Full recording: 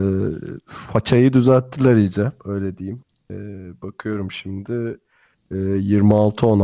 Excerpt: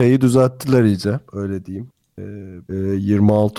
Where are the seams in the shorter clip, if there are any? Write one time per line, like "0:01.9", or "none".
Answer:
0:02.7

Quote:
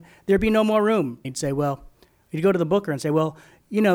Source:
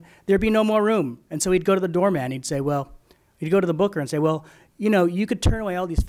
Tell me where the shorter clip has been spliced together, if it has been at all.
0:01.2

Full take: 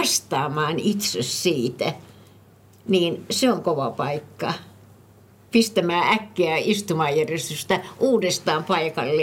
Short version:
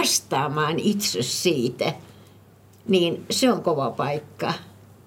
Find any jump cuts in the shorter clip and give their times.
none

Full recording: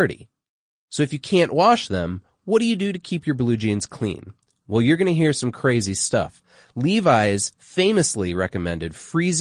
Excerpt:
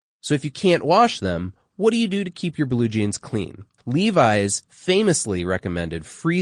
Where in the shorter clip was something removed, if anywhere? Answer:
0:03.8

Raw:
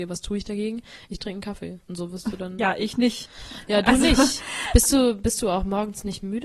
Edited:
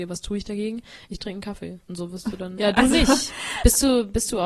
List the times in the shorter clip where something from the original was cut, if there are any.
0:02.6

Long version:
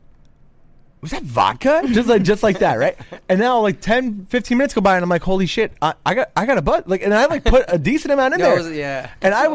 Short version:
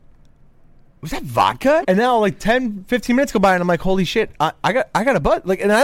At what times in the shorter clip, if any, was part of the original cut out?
0:01.8

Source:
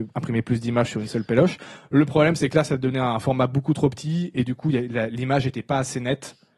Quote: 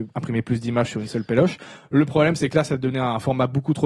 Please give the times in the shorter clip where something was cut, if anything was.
none

